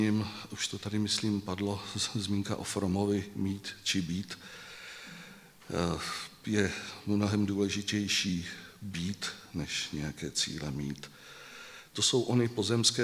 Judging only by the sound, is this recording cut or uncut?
cut